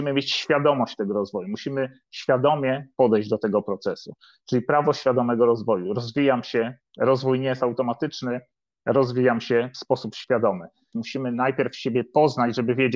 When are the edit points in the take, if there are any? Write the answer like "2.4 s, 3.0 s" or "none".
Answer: 10.9 s